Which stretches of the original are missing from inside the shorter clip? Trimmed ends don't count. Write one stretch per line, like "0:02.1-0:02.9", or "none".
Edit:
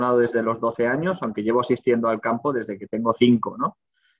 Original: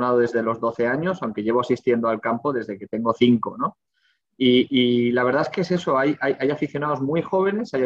none